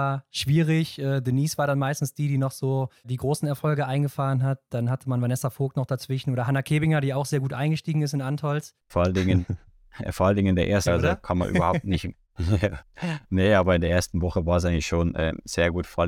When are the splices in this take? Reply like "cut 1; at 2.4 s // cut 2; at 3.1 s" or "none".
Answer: cut 1; at 8.9 s // cut 2; at 10.9 s